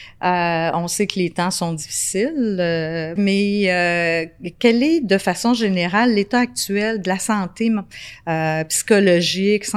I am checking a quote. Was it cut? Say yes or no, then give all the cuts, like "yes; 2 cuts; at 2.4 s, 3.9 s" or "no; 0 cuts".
yes; 1 cut; at 3.2 s